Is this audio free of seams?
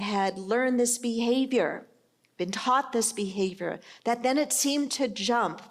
yes; 0 cuts

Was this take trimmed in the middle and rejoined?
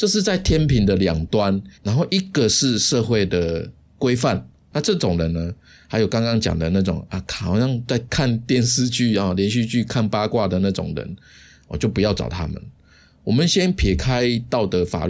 yes; 2 cuts; at 1.7 s, 4.6 s

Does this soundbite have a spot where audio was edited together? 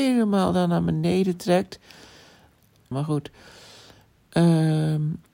yes; 1 cut; at 2.9 s

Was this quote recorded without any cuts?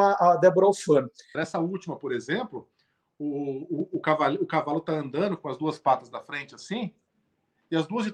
no; 1 cut; at 1.3 s

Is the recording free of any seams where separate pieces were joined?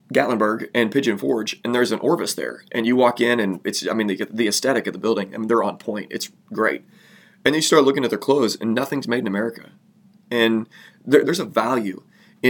no; 2 cuts; at 10.1 s, 11.2 s

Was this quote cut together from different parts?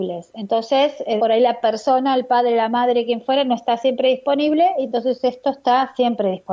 yes; 1 cut; at 1.2 s

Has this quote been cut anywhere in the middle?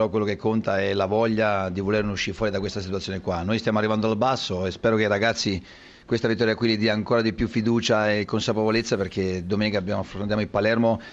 no; 0 cuts

